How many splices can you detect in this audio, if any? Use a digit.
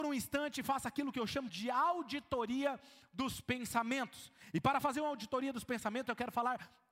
1